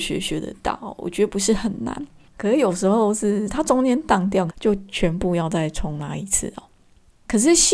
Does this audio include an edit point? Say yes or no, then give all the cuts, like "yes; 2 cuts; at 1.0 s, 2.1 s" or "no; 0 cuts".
yes; 2 cuts; at 2.3 s, 4.5 s